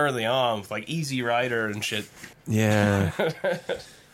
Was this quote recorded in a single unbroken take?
no; 1 cut; at 2.3 s

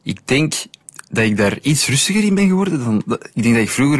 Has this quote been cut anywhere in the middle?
no; 0 cuts

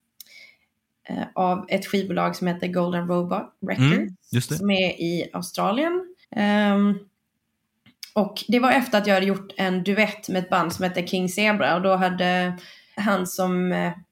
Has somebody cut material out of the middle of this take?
yes; 2 cuts; at 6.2 s, 13.0 s

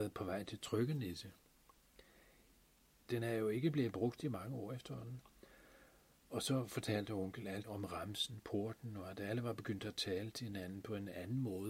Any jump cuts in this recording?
yes; 2 cuts; at 3.1 s, 7.6 s

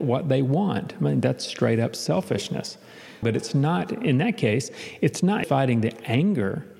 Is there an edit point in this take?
yes; 2 cuts; at 3.2 s, 5.4 s

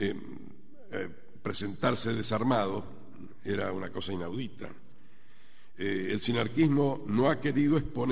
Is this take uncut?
yes; 0 cuts

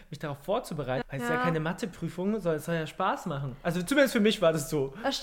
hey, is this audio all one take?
no; 1 cut; at 1.0 s

